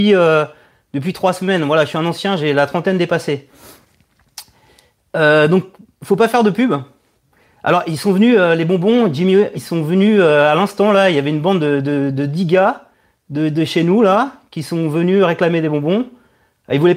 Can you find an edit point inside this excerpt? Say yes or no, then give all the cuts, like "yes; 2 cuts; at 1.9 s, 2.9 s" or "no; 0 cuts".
yes; 1 cut; at 9.5 s